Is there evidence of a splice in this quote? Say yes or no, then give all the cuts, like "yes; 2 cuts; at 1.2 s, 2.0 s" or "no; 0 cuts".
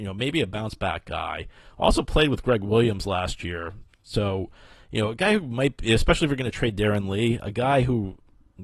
no; 0 cuts